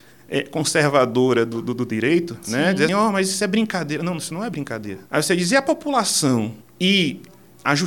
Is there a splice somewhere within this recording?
yes; 3 cuts; at 2.9 s, 5.1 s, 6.6 s

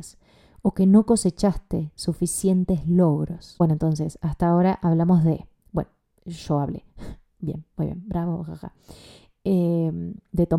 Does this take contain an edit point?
no; 0 cuts

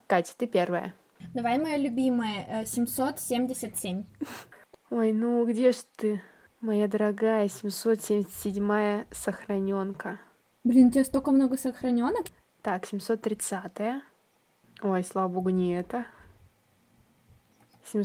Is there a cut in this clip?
no; 0 cuts

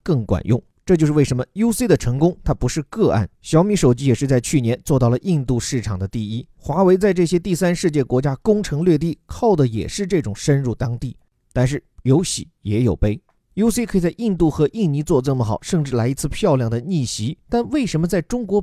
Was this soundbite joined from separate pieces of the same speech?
no; 0 cuts

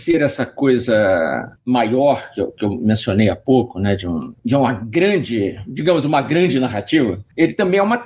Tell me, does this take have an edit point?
no; 0 cuts

